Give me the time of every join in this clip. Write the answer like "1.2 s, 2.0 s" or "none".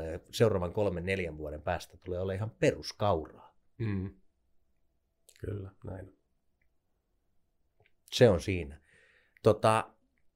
none

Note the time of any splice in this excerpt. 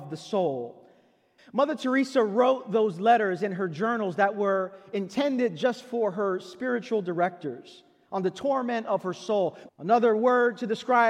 1.4 s, 9.7 s

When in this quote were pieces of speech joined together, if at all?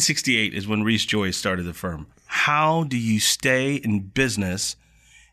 2.1 s

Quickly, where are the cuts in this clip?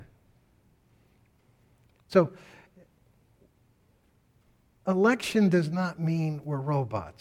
2.0 s

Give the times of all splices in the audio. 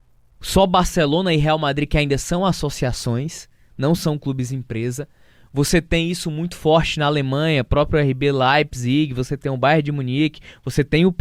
none

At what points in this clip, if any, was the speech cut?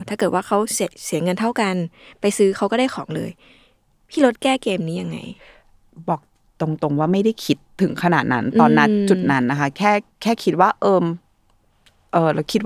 10.1 s

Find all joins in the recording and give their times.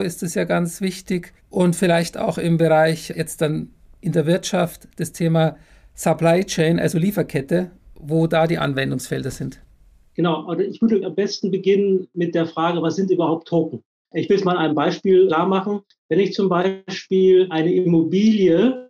11.0 s, 14.1 s

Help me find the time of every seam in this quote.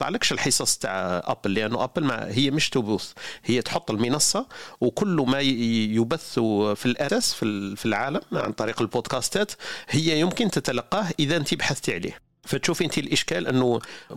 7.1 s

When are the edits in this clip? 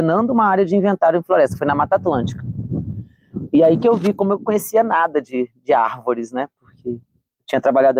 none

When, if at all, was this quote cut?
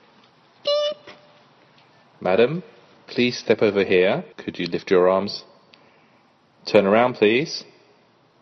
4.3 s

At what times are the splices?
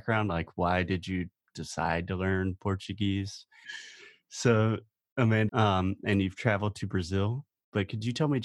3.6 s, 5.5 s

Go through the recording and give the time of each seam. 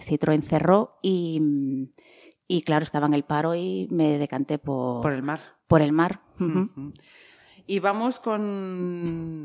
none

